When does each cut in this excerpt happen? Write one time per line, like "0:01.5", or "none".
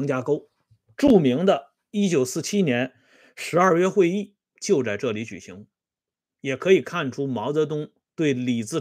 none